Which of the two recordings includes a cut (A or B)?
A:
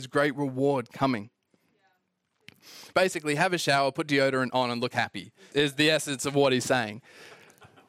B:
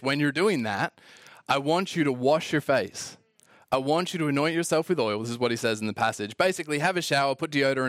A